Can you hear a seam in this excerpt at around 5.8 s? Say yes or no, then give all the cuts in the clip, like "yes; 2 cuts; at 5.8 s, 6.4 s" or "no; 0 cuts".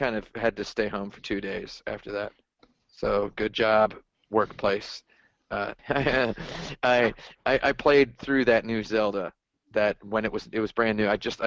yes; 1 cut; at 5.8 s